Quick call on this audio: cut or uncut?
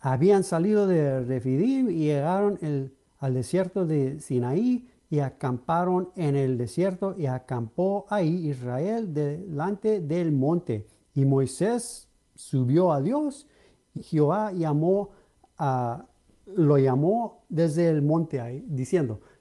cut